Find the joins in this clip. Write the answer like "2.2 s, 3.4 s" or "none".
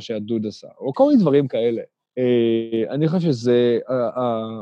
0.9 s